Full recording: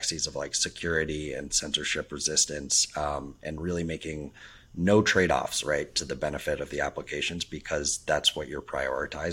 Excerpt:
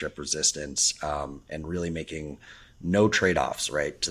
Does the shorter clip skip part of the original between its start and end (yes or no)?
no